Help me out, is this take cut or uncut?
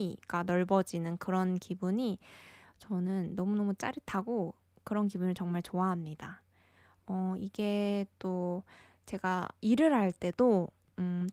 uncut